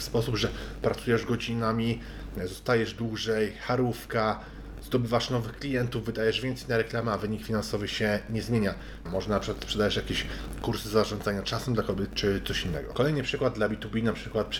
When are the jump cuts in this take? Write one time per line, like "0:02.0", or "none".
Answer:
0:09.1